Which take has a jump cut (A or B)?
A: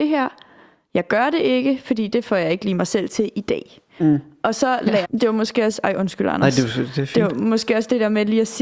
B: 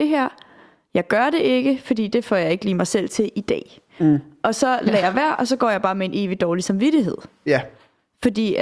A